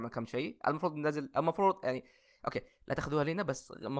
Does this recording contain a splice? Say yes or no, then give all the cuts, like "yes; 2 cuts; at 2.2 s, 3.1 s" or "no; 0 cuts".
no; 0 cuts